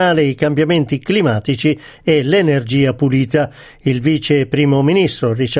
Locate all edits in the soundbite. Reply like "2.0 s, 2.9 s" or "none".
none